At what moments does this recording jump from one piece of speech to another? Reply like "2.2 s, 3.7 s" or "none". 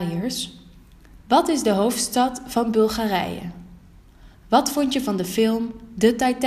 1.2 s